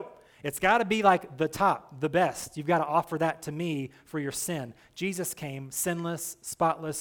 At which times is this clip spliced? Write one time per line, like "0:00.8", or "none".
none